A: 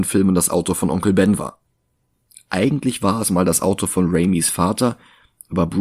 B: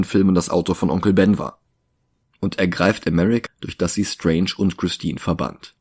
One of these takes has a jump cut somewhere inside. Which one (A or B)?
B